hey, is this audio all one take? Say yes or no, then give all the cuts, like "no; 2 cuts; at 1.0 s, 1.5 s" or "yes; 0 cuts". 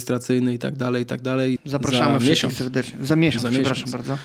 no; 1 cut; at 1.6 s